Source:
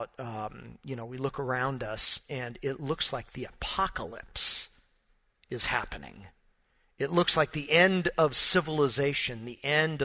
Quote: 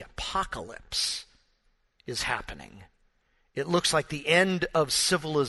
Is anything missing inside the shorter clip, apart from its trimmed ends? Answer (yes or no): no